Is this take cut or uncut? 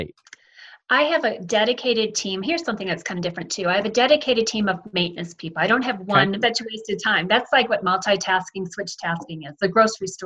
cut